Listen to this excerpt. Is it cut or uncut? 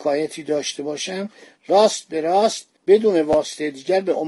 cut